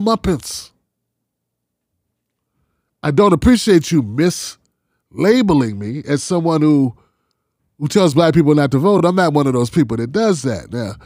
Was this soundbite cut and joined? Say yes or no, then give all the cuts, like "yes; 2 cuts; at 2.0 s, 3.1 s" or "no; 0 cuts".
no; 0 cuts